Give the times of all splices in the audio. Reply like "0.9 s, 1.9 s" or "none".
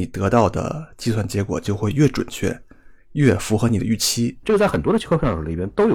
4.4 s